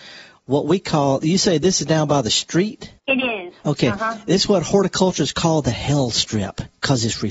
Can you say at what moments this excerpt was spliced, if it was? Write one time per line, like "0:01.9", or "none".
0:03.0

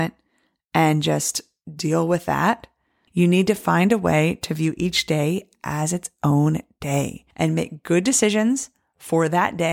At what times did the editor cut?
0:03.1
0:07.3

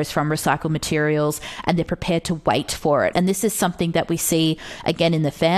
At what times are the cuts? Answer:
0:03.1

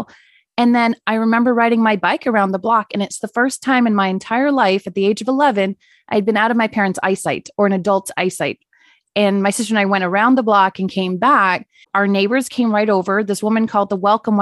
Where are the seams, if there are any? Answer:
0:11.8

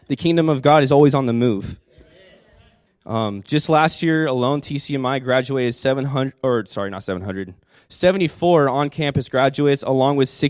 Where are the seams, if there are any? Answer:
0:02.9

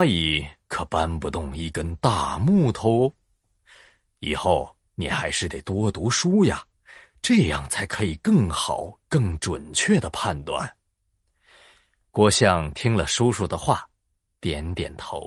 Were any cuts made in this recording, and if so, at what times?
none

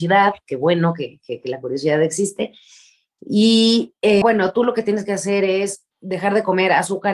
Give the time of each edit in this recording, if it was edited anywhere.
0:04.2
0:05.9

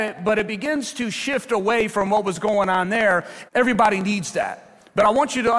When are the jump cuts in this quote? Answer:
0:03.5

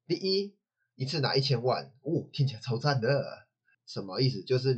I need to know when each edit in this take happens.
0:03.7

